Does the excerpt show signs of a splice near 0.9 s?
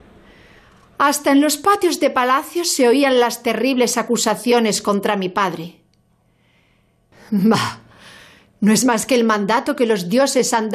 no; 1 cut; at 7.1 s

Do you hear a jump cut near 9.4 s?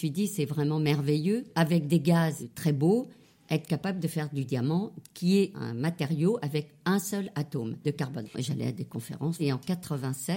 yes; 2 cuts; at 8.2 s, 9.4 s

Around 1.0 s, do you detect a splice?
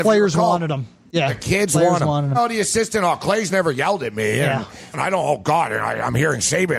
no; 2 cuts; at 2.3 s, 4.9 s

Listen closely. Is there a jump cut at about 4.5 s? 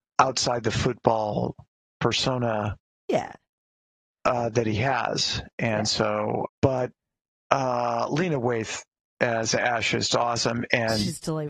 no; 2 cuts; at 6.4 s, 10.1 s

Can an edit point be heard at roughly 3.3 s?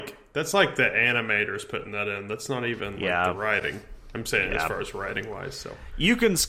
no; 0 cuts

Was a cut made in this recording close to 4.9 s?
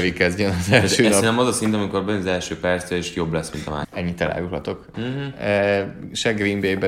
yes; 2 cuts; at 3.8 s, 4.9 s

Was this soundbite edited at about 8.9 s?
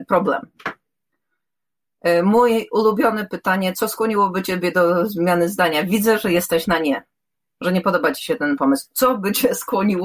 no; 0 cuts

